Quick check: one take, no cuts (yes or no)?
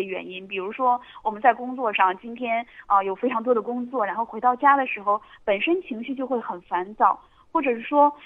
yes